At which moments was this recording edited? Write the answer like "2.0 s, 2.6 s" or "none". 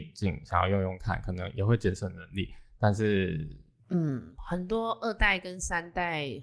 3.8 s

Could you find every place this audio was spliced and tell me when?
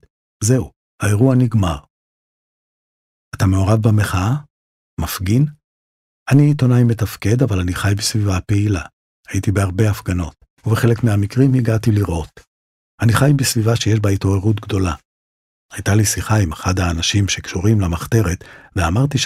10.5 s

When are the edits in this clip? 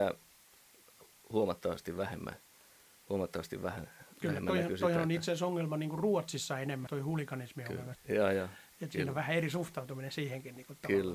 6.9 s, 7.9 s

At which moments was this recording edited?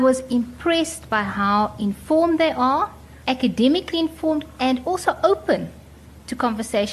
3.2 s, 4.6 s

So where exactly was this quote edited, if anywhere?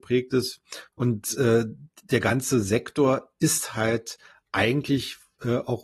0.9 s

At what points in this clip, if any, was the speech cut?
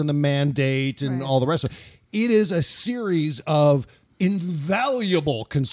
none

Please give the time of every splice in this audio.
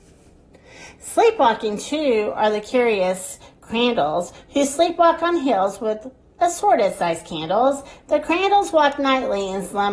none

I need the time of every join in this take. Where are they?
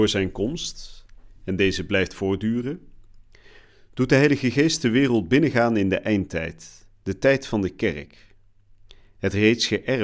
none

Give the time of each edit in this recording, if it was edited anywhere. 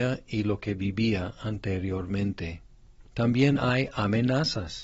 3.1 s

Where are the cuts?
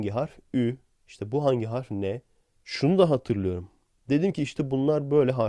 none

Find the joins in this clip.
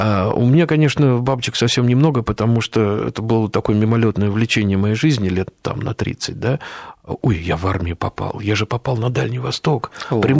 none

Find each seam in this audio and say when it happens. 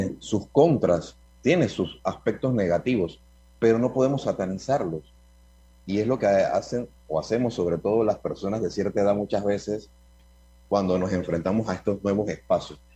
none

